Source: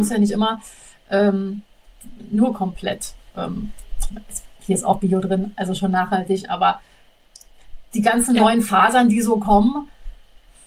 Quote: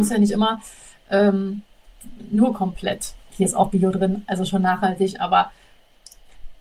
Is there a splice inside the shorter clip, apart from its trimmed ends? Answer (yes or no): yes